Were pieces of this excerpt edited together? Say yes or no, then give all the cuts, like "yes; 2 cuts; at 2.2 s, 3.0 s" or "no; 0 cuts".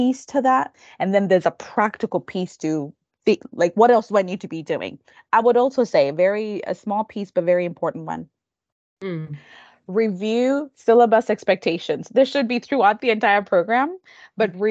no; 0 cuts